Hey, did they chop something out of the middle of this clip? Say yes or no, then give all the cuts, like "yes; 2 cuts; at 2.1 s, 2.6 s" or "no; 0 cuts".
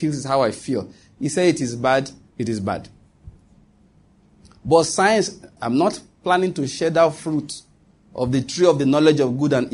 yes; 1 cut; at 5.6 s